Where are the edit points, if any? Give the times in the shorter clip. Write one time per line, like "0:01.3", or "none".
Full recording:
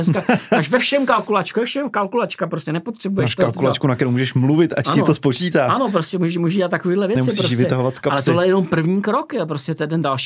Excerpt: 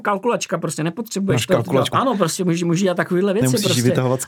0:01.9